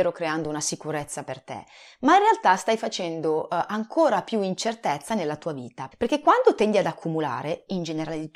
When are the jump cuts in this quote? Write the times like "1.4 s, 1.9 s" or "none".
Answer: 5.9 s